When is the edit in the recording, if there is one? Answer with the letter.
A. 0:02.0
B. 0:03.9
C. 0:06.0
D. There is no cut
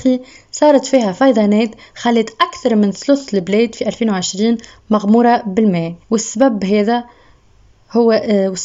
C